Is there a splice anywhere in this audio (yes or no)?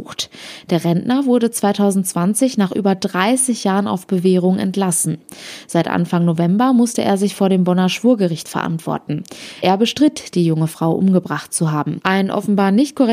no